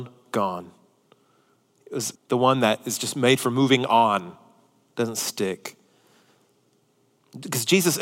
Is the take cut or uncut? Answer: cut